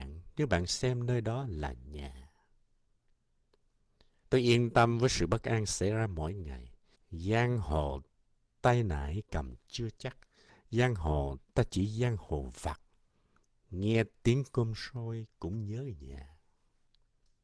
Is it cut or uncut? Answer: cut